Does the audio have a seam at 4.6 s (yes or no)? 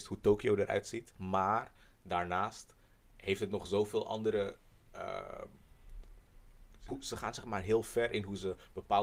no